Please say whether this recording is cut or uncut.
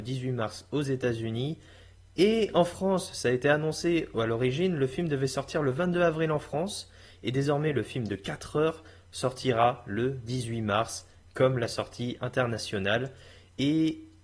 uncut